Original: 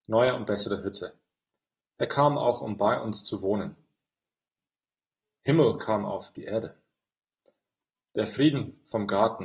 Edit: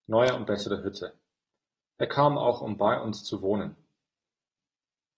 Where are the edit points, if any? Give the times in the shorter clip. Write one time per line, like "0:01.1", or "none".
none